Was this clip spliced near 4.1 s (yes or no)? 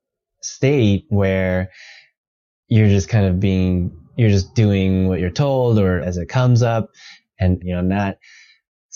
no